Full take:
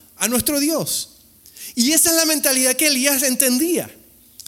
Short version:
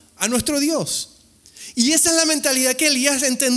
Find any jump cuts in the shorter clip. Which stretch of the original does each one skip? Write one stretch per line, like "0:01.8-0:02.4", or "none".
none